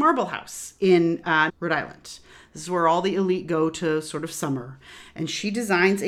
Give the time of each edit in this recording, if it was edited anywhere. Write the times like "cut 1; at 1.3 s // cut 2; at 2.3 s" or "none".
cut 1; at 1.5 s